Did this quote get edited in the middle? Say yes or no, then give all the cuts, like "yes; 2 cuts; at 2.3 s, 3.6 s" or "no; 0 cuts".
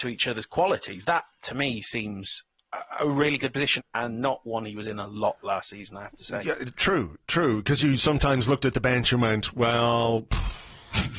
yes; 1 cut; at 3.8 s